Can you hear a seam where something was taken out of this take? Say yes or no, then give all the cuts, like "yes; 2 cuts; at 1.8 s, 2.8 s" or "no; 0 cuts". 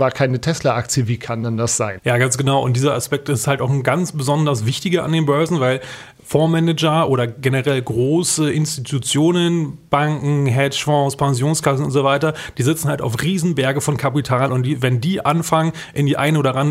yes; 1 cut; at 2.0 s